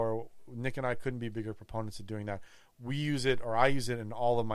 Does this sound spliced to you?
no; 0 cuts

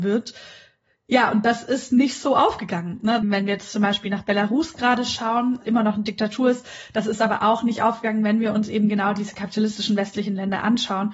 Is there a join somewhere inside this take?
yes; 1 cut; at 3.2 s

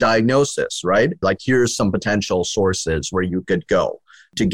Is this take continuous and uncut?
no; 1 cut; at 1.2 s

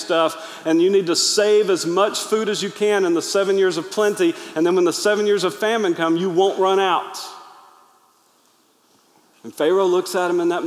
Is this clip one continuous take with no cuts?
yes; 0 cuts

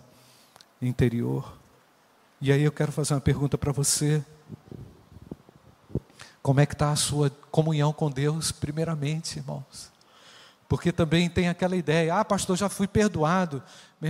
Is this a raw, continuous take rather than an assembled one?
yes; 0 cuts

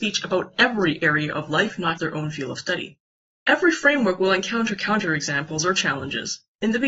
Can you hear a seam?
yes; 1 cut; at 2.0 s

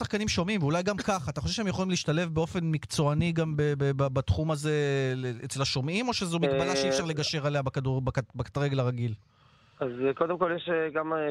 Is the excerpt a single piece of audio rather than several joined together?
yes; 0 cuts

